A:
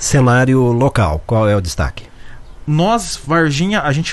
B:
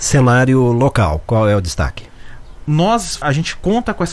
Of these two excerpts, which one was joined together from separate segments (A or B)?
B